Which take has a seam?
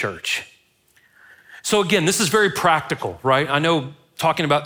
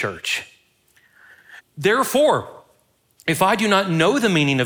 second; 1 cut; at 1.6 s

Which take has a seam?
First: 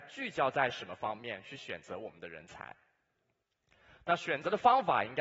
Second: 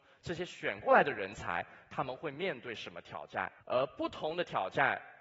second; 1 cut; at 3.6 s

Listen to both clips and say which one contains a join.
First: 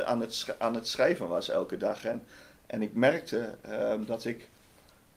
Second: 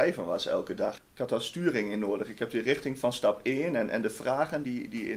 second; 1 cut; at 1.0 s

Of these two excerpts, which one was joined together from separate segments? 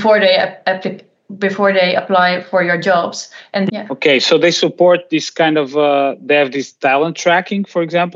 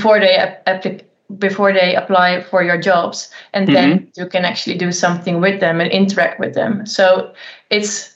first; 1 cut; at 3.7 s

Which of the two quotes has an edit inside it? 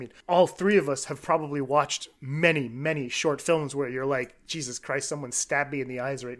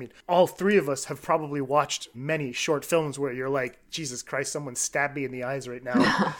second; 1 cut; at 2.1 s

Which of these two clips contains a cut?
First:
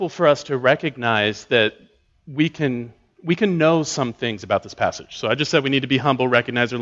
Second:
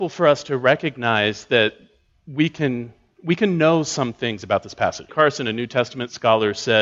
second; 1 cut; at 5.1 s

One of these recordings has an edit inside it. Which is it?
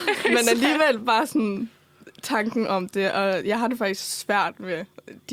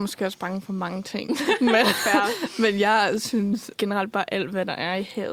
second; 1 cut; at 3.8 s

